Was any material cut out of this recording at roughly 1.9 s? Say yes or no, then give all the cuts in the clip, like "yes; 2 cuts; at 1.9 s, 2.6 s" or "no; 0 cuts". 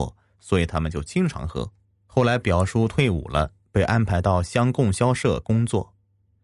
yes; 1 cut; at 1.9 s